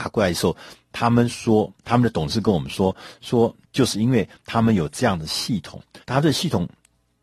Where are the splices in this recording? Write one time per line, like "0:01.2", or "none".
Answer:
0:06.0